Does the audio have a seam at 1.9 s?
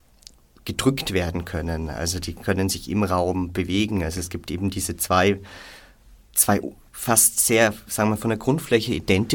no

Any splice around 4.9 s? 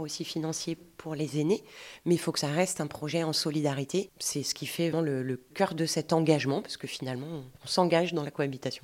yes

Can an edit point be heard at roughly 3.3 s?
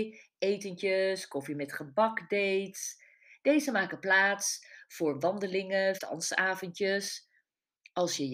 no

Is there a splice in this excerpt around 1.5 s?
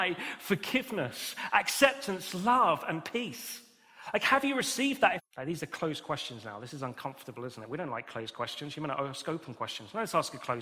no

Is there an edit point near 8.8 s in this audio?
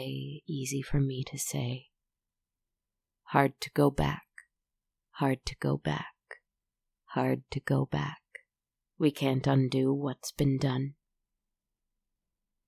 yes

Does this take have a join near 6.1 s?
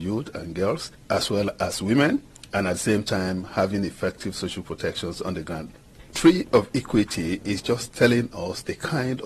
yes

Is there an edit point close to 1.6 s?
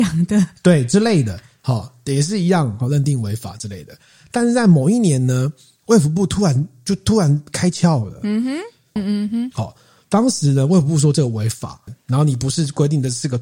no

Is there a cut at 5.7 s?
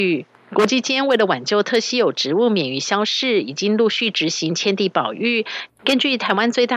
yes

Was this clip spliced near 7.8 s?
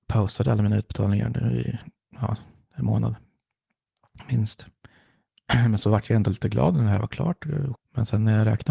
yes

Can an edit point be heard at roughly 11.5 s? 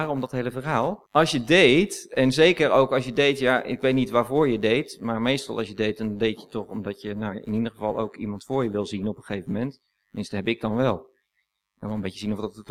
no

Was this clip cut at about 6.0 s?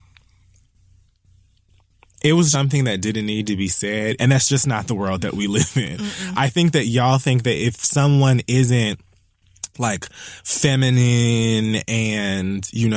no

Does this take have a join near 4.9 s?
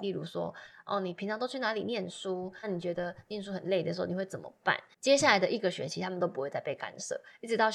yes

